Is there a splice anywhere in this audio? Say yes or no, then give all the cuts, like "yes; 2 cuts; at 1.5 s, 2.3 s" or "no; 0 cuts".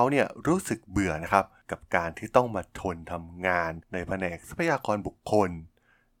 no; 0 cuts